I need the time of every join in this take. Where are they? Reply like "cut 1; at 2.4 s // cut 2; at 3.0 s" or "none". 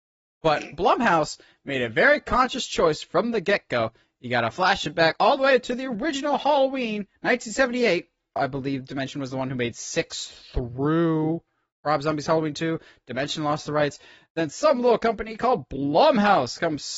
cut 1; at 8.4 s